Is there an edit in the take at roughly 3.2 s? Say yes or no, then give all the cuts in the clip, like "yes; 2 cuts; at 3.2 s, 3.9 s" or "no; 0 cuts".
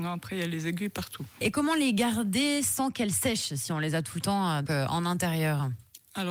no; 2 cuts; at 1.4 s, 4.7 s